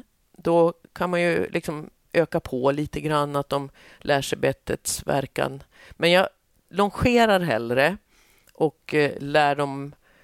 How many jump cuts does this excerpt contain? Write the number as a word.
zero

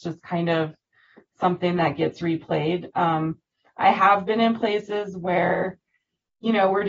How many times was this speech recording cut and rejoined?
zero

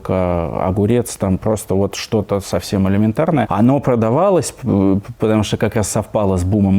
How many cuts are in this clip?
one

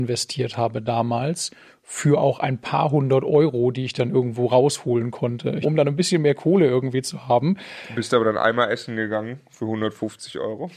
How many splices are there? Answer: one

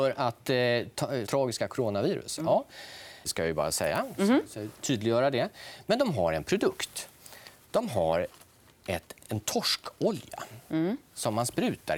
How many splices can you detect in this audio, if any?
two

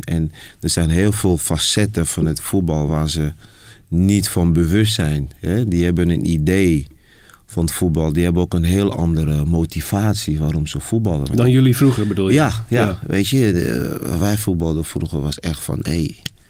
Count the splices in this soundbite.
zero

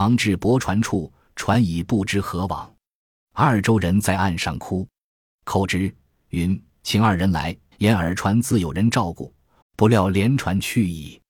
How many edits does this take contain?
two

